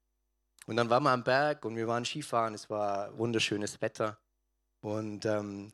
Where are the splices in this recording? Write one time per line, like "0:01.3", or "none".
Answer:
none